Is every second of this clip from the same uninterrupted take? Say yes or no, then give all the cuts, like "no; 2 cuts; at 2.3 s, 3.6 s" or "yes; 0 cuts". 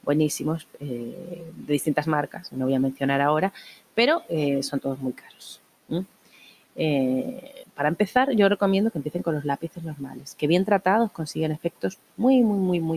no; 1 cut; at 7.6 s